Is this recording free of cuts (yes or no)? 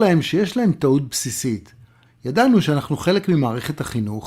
no